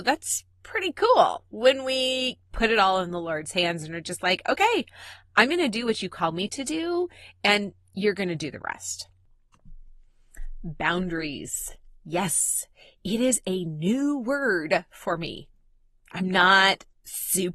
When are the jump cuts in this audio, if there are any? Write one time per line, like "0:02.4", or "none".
none